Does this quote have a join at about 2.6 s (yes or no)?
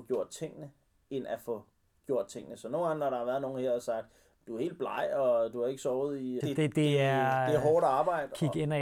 no